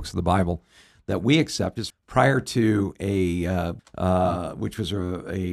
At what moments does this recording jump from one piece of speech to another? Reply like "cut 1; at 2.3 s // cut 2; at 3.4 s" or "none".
cut 1; at 1.9 s // cut 2; at 3.8 s